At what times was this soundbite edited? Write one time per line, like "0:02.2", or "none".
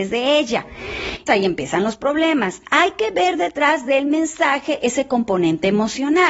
0:01.3